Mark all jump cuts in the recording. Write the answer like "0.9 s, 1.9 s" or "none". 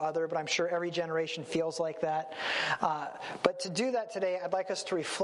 none

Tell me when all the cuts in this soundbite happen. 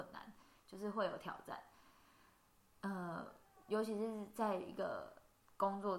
none

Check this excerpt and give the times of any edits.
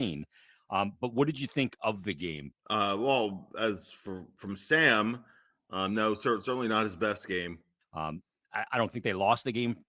2.5 s, 7.8 s

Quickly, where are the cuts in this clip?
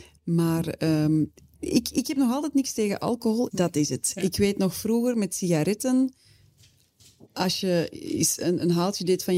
1.6 s, 3.5 s

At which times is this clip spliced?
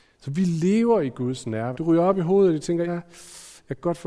1.7 s, 2.9 s

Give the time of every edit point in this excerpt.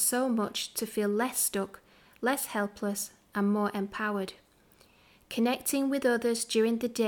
none

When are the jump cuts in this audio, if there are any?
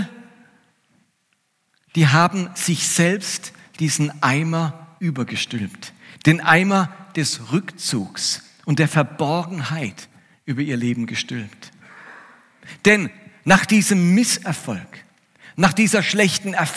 none

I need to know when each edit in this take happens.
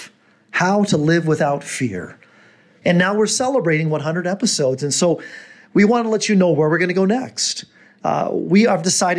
2.8 s

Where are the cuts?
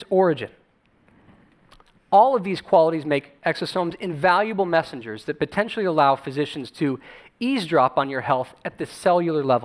none

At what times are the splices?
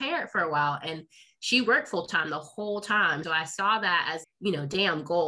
3.2 s, 4.2 s

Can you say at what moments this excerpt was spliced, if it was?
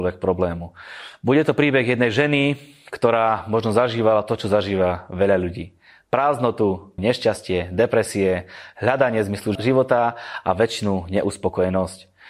7.0 s, 9.6 s

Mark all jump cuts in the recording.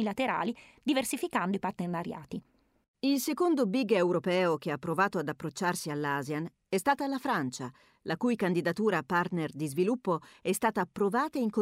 2.8 s

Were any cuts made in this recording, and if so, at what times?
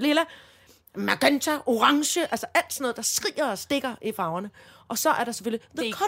none

